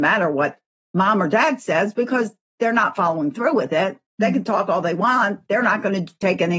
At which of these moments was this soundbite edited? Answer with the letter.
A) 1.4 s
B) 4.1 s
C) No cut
B